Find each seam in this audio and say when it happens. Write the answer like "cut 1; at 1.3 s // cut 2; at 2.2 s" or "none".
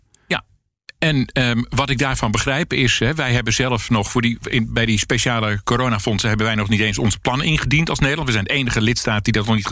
none